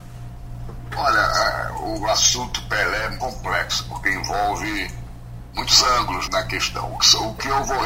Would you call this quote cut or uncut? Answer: cut